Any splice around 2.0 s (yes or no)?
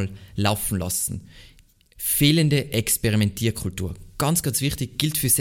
yes